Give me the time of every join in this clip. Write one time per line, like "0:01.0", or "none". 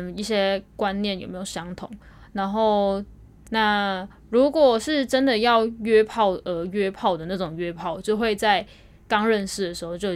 0:03.4